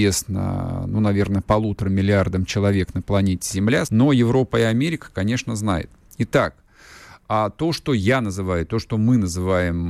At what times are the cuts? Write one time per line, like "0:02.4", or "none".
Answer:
0:03.9